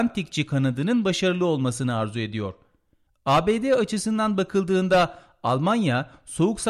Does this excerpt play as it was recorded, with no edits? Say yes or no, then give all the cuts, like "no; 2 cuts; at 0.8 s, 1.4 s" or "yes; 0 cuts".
no; 1 cut; at 3.1 s